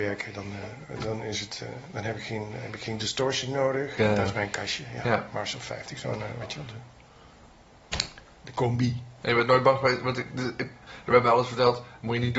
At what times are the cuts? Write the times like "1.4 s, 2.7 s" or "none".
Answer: 4.0 s